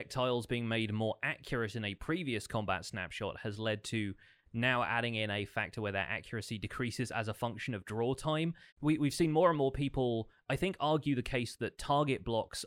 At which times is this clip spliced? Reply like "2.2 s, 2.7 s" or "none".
8.7 s